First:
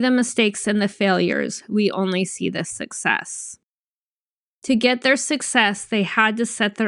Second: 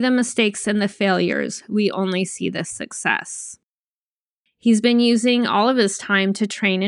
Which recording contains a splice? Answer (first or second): second